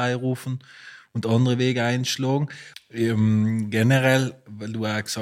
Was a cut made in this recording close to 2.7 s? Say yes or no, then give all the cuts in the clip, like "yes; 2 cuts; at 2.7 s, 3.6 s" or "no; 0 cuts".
yes; 1 cut; at 2.7 s